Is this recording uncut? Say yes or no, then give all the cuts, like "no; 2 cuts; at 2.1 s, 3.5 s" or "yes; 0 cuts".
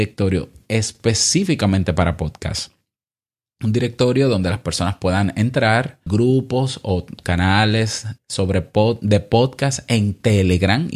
no; 2 cuts; at 6.1 s, 8.2 s